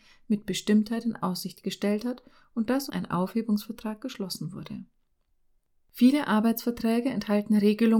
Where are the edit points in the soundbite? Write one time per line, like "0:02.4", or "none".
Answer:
0:02.9